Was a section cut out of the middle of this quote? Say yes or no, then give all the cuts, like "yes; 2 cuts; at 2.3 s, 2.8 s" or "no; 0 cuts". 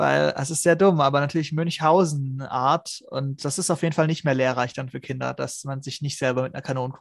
no; 0 cuts